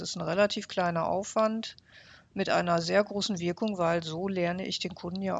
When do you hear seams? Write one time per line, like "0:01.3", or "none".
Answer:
none